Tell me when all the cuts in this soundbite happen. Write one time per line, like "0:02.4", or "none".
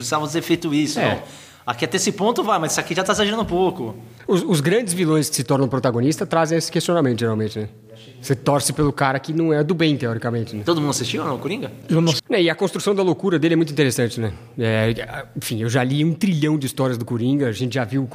0:12.2